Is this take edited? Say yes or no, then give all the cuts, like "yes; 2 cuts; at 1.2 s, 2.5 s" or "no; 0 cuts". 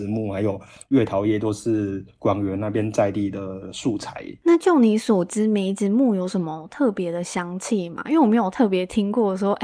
no; 0 cuts